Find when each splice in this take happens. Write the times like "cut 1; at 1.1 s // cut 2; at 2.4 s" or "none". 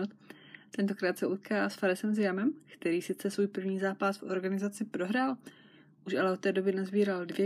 none